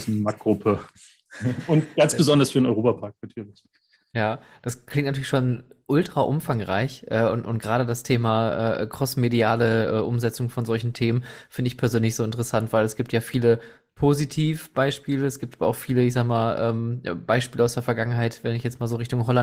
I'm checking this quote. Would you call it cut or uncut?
uncut